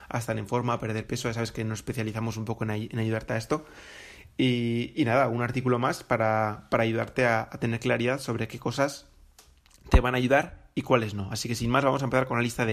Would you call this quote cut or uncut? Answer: uncut